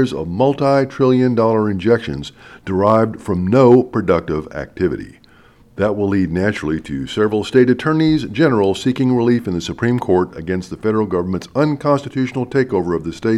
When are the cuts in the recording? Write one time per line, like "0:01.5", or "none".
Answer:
0:05.6